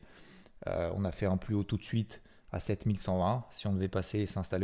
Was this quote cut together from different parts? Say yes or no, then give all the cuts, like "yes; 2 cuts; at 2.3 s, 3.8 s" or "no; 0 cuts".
no; 0 cuts